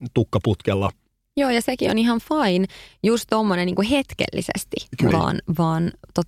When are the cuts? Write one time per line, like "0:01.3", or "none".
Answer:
0:05.1